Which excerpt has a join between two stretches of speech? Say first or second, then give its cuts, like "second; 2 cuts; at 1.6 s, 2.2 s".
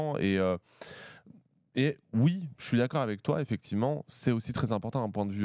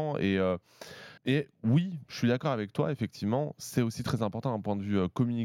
second; 1 cut; at 1.2 s